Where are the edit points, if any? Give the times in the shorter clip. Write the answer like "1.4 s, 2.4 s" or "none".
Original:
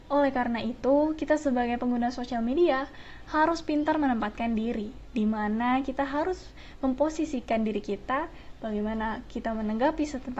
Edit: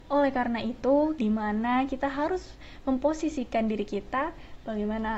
1.2 s